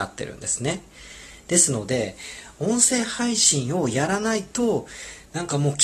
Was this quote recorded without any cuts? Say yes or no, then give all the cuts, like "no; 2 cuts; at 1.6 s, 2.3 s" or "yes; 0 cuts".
yes; 0 cuts